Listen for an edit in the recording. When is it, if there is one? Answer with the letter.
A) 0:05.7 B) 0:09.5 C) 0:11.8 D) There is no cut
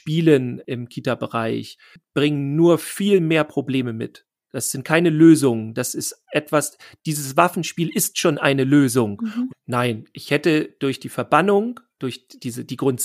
B